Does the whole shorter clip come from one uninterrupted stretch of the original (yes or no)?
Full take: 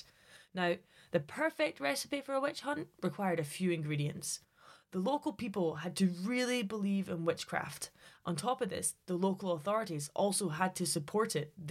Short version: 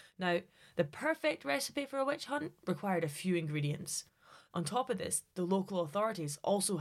no